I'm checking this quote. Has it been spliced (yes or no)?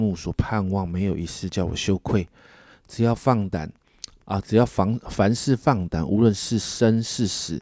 no